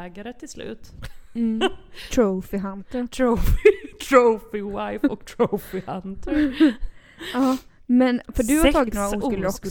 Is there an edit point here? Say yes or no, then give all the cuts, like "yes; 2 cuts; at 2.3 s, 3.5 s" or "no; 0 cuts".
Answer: no; 0 cuts